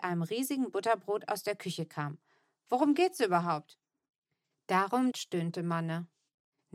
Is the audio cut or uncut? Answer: cut